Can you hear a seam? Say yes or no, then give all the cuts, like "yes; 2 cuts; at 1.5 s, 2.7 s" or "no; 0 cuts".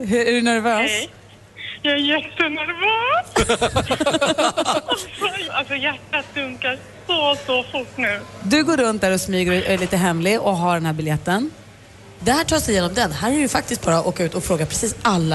yes; 2 cuts; at 5.5 s, 12.2 s